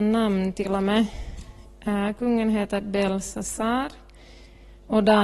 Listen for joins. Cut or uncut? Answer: uncut